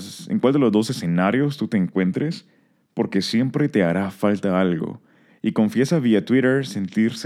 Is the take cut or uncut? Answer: cut